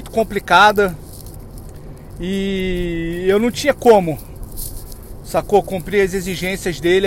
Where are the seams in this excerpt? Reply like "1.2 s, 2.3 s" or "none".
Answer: none